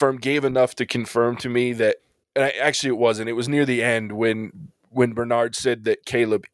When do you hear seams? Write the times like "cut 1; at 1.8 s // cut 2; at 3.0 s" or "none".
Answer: none